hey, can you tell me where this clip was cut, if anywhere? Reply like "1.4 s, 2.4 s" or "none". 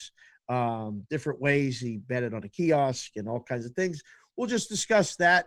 none